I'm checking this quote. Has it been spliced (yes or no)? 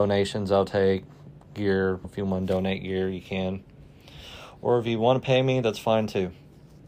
yes